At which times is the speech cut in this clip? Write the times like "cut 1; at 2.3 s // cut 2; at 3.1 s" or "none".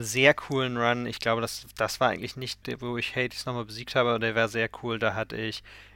cut 1; at 2.6 s